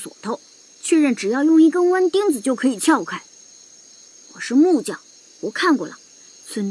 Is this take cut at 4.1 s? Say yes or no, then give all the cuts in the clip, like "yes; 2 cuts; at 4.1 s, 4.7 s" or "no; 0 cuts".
no; 0 cuts